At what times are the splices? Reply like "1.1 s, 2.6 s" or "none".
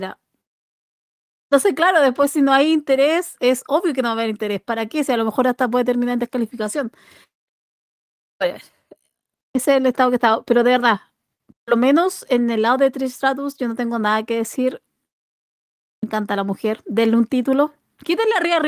none